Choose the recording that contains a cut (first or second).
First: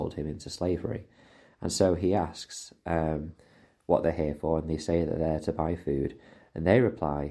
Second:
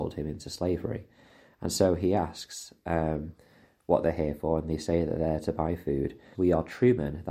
second